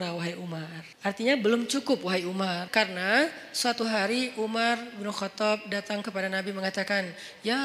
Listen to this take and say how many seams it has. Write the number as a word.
two